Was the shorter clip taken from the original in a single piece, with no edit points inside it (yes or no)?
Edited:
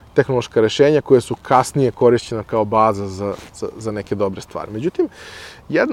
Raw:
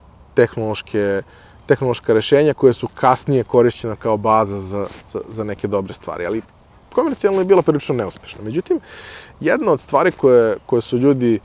no